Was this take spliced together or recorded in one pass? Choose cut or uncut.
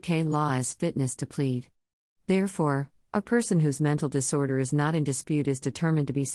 cut